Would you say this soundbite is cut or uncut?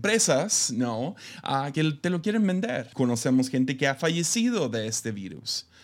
cut